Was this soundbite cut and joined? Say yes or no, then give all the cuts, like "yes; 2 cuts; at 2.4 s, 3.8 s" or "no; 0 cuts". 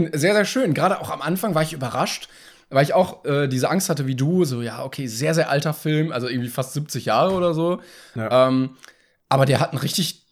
no; 0 cuts